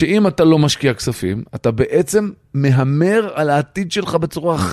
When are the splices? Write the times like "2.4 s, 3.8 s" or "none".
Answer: none